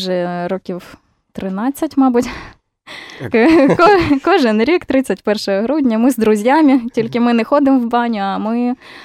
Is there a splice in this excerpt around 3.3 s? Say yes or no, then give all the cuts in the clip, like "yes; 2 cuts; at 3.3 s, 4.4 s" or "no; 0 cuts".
yes; 1 cut; at 3.3 s